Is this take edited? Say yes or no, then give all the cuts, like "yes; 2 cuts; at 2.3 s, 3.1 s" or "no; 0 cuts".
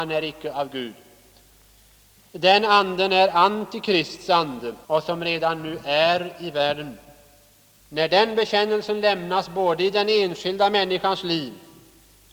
yes; 2 cuts; at 4.8 s, 7.8 s